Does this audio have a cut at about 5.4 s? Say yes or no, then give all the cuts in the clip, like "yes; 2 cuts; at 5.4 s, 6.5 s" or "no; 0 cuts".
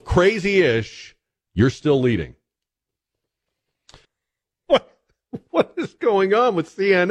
no; 1 cut; at 4.0 s